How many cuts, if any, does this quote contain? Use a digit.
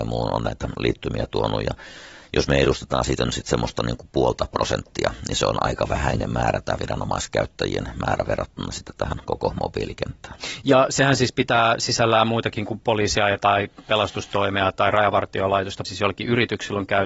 1